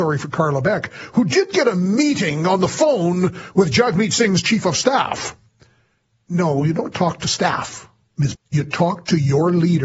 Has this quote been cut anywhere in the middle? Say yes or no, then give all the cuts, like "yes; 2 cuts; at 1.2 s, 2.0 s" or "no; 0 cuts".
yes; 1 cut; at 8.4 s